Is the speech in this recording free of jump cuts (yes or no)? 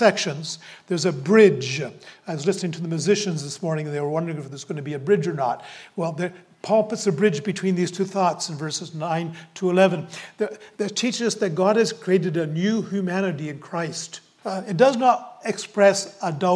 no